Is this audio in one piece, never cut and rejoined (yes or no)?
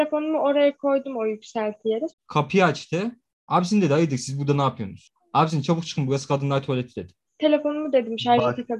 no